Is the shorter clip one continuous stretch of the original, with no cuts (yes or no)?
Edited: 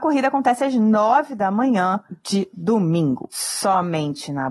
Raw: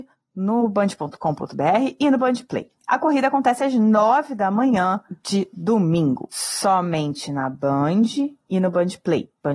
yes